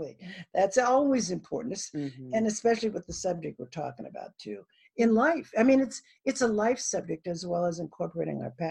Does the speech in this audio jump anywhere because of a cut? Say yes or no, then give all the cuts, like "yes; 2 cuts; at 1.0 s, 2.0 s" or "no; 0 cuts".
no; 0 cuts